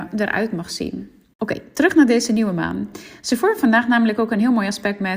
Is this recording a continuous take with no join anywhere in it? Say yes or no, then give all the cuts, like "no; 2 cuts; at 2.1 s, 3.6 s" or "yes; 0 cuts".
yes; 0 cuts